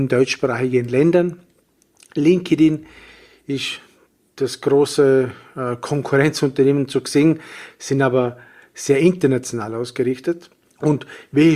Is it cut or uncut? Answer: uncut